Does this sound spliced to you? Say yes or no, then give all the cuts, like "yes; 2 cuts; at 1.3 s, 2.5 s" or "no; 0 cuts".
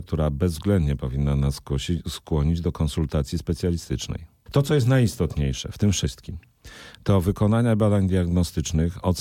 yes; 1 cut; at 4.5 s